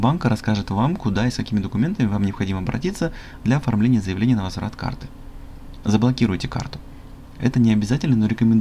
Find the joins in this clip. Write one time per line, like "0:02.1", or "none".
0:05.8